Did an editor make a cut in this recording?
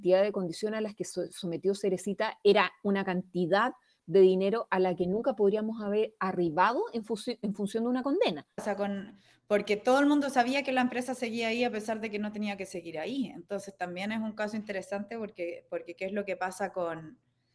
yes; 1 cut; at 8.6 s

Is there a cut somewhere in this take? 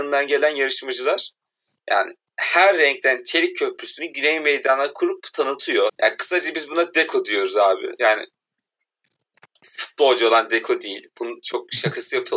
yes; 1 cut; at 5.9 s

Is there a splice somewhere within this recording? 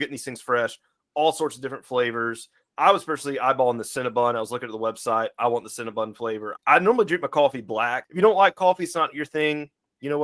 yes; 2 cuts; at 6.6 s, 8.0 s

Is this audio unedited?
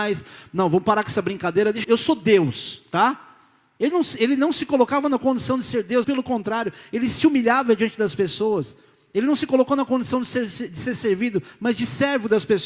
no; 2 cuts; at 1.8 s, 6.0 s

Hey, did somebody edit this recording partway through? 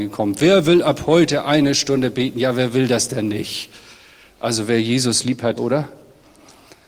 yes; 1 cut; at 5.6 s

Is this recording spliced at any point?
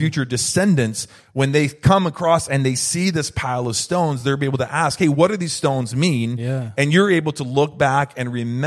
no; 0 cuts

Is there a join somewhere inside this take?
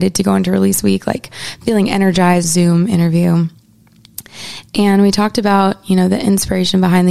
yes; 1 cut; at 2.4 s

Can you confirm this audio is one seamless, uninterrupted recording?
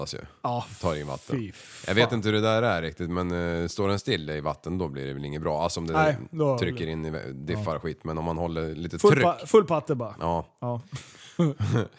yes; 0 cuts

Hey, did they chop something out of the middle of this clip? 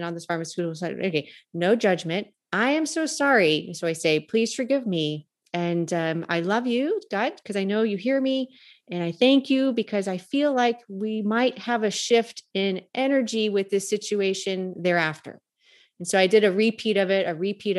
no; 0 cuts

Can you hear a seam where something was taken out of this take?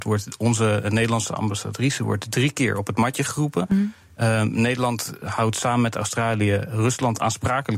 no; 0 cuts

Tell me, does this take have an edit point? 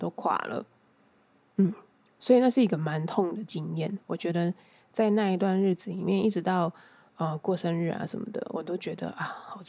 no; 0 cuts

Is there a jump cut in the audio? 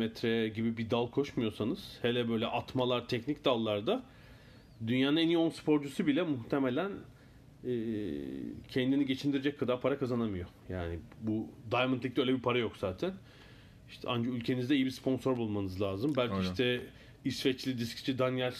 no; 0 cuts

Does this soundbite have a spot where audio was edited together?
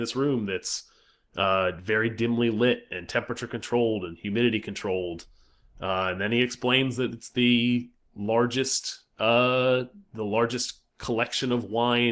no; 0 cuts

